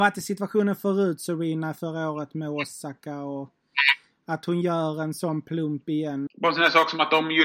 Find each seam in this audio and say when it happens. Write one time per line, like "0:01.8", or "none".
0:06.3